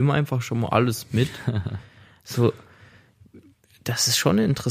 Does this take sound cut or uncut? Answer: uncut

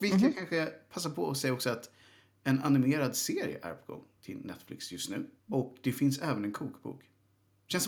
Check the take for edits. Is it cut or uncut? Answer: cut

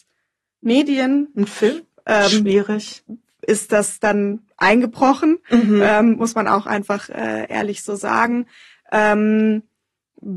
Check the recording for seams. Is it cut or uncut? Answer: cut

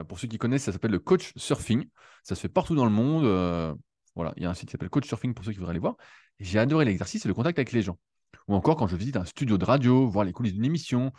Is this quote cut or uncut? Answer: uncut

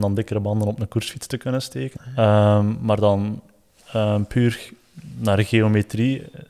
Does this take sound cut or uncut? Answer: cut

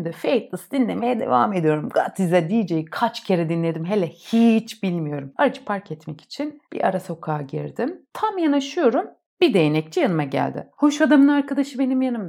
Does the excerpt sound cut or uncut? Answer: cut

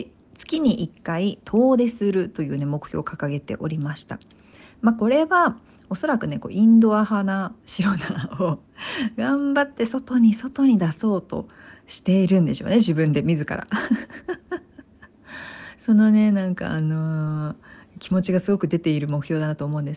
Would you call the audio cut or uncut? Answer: uncut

